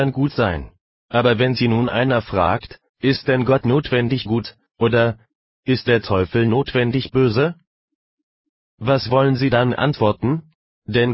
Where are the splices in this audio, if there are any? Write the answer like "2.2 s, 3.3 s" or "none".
0.9 s, 2.9 s